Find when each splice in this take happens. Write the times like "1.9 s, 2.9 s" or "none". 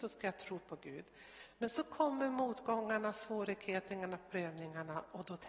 none